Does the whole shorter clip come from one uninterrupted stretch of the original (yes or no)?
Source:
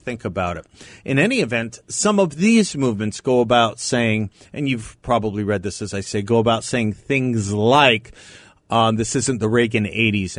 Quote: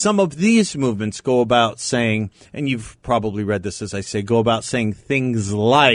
yes